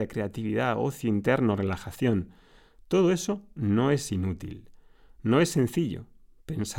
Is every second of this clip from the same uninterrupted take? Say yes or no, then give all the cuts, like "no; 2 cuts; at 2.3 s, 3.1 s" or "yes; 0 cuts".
yes; 0 cuts